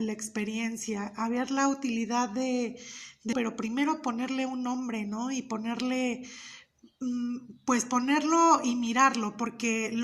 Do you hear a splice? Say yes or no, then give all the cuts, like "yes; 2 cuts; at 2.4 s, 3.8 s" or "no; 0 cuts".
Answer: yes; 1 cut; at 3.3 s